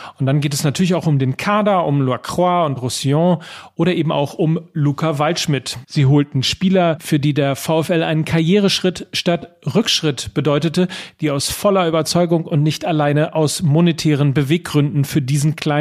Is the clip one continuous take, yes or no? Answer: no